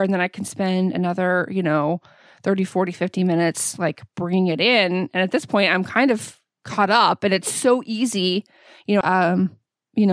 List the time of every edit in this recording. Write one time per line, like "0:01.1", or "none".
0:09.0